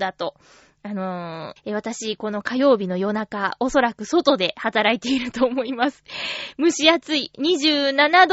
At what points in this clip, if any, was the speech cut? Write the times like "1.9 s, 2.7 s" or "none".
1.6 s